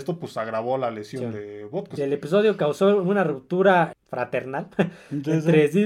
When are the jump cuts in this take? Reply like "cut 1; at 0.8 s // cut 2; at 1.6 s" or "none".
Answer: cut 1; at 2.0 s // cut 2; at 3.9 s